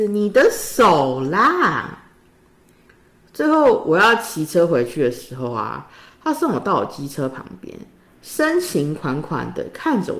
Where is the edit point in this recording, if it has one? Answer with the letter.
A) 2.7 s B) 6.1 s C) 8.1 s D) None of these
C